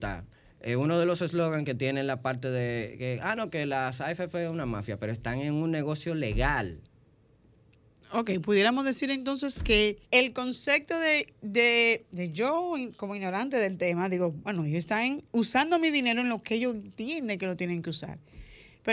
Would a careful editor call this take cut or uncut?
cut